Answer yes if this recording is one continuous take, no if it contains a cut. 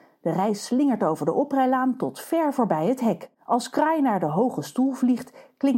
no